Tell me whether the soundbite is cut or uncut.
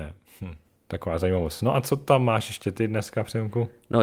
uncut